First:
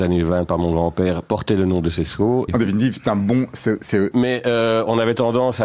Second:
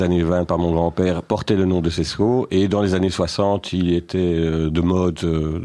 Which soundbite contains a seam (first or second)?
first